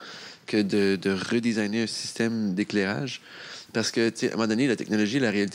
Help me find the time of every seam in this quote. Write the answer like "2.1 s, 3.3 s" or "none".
3.7 s